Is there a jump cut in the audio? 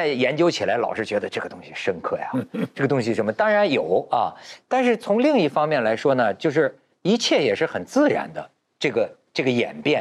no; 0 cuts

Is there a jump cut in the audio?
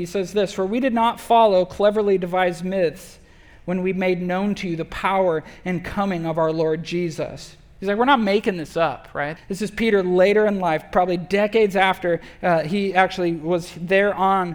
yes; 1 cut; at 9.4 s

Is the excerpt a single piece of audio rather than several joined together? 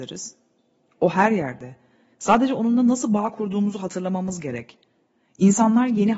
yes; 0 cuts

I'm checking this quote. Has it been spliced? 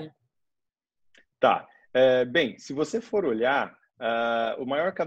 no; 0 cuts

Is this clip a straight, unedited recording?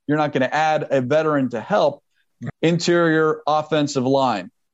no; 1 cut; at 2.5 s

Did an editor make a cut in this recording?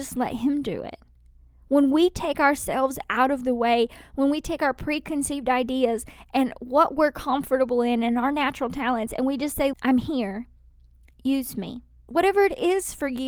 yes; 2 cuts; at 9.7 s, 12.1 s

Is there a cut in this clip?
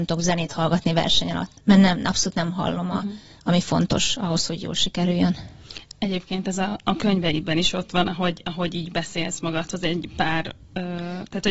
no; 0 cuts

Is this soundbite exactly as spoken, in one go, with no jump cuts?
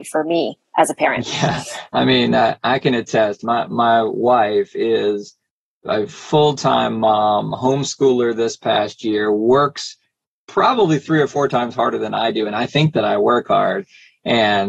yes; 0 cuts

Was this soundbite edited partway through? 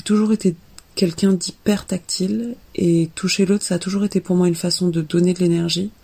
no; 0 cuts

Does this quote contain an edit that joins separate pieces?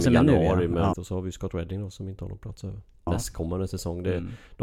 yes; 2 cuts; at 0.9 s, 3.1 s

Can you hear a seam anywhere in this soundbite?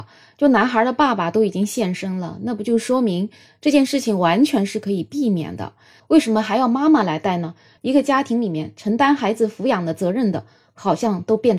yes; 2 cuts; at 6.0 s, 7.8 s

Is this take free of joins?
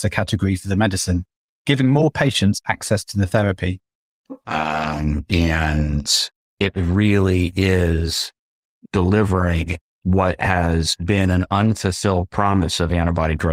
no; 1 cut; at 4.4 s

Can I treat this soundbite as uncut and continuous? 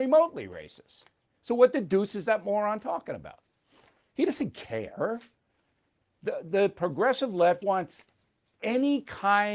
no; 1 cut; at 7.6 s

